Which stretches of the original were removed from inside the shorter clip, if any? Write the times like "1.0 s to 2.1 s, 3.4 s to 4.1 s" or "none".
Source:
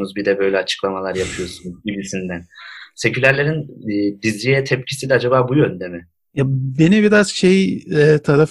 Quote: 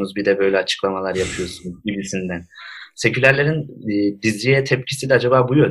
none